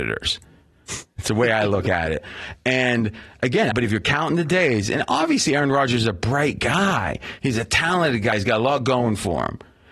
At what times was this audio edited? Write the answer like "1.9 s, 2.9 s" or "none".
3.7 s, 8.3 s